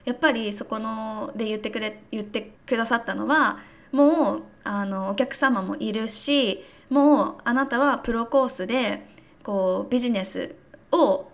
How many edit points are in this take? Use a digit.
1